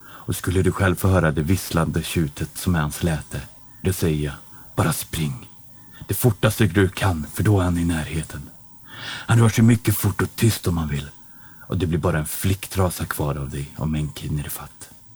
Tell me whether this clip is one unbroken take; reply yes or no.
no